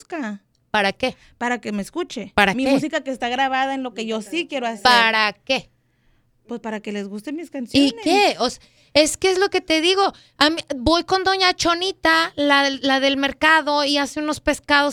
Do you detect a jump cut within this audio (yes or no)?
no